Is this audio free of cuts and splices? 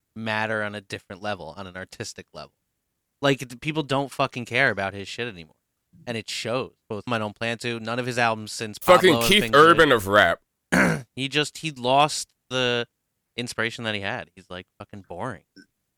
no; 1 cut; at 7.1 s

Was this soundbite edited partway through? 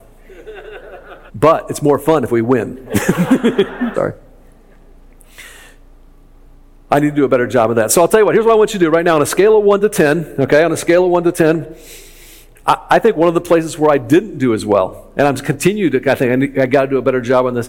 yes; 3 cuts; at 1.3 s, 3.9 s, 12.6 s

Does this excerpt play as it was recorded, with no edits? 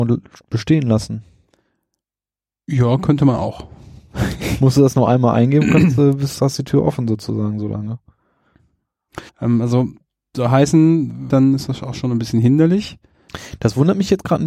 no; 2 cuts; at 9.3 s, 11.3 s

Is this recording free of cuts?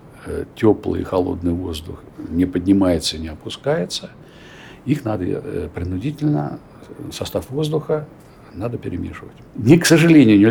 no; 1 cut; at 9.5 s

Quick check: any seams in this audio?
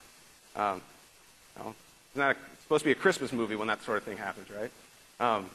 no; 0 cuts

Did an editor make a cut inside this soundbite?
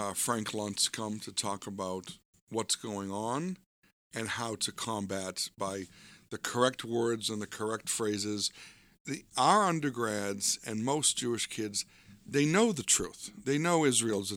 no; 0 cuts

